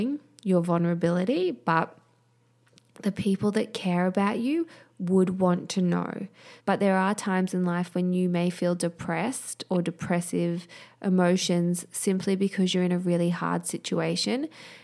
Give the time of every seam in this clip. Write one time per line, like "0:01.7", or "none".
0:06.6